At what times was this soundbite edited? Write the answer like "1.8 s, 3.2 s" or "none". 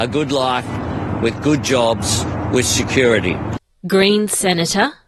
none